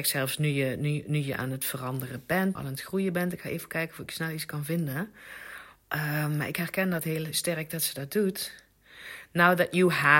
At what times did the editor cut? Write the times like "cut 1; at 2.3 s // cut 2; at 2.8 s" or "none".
cut 1; at 2.6 s